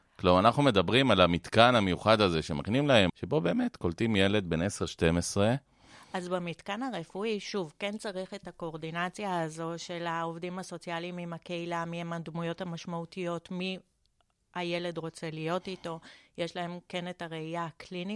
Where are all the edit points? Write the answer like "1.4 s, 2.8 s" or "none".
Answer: 3.1 s